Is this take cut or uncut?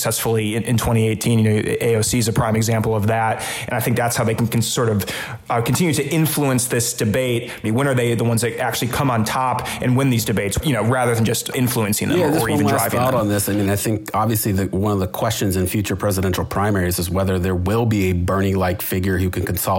cut